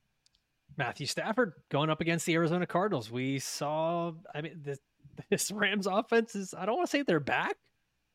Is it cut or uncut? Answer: uncut